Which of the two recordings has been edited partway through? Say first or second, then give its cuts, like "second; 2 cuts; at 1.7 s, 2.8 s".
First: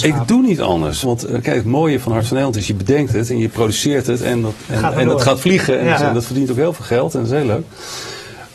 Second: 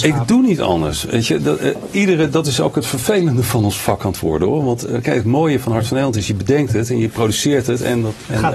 first; 2 cuts; at 1.0 s, 6.0 s